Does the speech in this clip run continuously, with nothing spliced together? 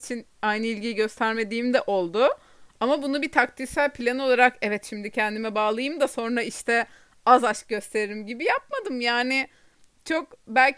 yes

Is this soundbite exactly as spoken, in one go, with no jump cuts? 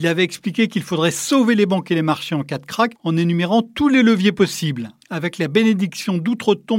no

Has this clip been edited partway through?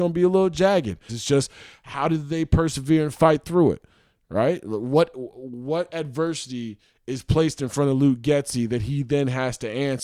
yes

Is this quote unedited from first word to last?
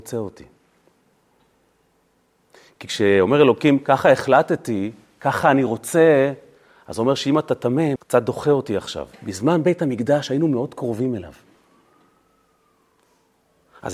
no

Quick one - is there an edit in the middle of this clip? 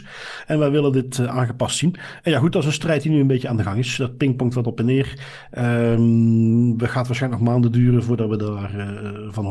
no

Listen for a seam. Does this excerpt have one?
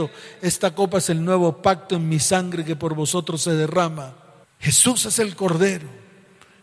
yes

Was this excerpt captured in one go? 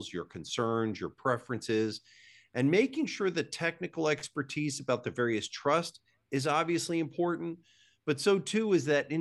yes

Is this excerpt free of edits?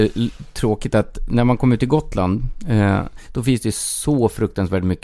yes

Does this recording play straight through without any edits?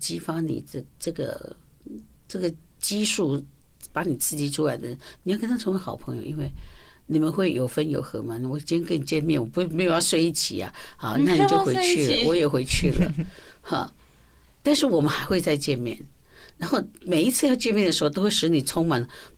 yes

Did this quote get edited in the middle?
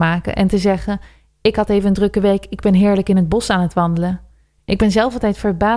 no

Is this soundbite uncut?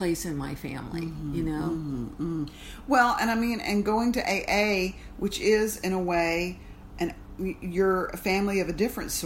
yes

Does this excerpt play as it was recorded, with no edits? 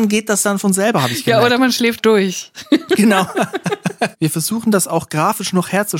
no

